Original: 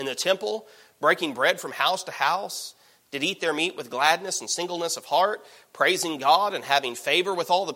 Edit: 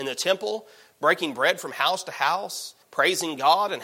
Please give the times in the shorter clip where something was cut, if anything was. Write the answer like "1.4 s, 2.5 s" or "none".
2.8 s